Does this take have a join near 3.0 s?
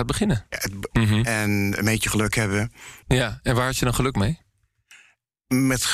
yes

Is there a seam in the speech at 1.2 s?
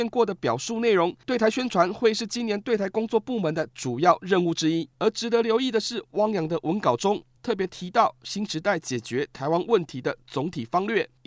yes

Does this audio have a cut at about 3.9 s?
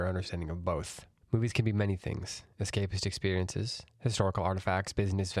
no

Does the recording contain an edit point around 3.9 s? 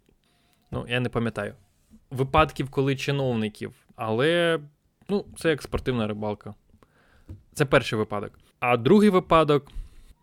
yes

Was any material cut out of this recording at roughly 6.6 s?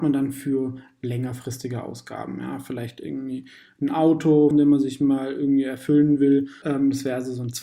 yes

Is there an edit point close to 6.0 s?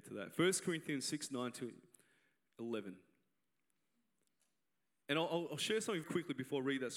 yes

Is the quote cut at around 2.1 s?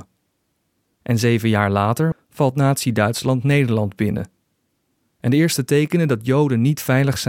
yes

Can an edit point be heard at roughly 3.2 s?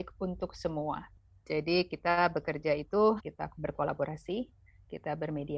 yes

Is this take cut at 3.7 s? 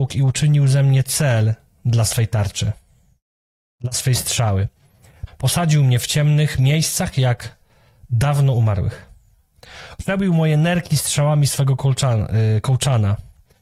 no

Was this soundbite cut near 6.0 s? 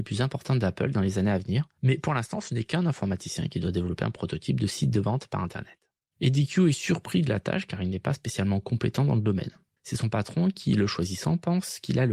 no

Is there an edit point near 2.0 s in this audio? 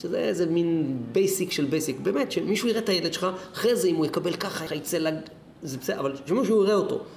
no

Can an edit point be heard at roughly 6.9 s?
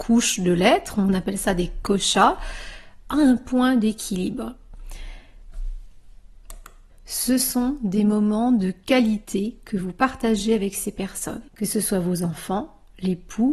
yes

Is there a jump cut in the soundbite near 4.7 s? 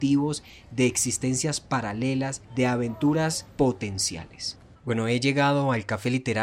yes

